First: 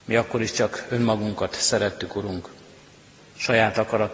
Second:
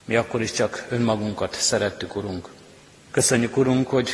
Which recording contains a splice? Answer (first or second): second